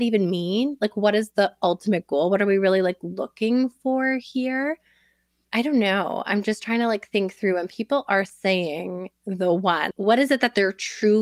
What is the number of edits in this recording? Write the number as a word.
one